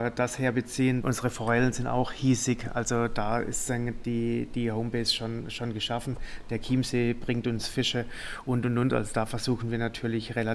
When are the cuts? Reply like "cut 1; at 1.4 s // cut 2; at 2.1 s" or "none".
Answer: cut 1; at 1.0 s